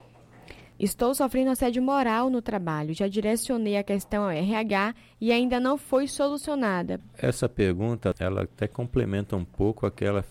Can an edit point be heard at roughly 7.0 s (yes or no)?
yes